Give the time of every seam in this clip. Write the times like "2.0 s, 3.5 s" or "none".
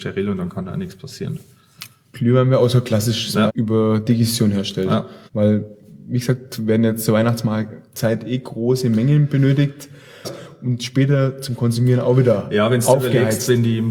3.5 s, 5.3 s, 10.2 s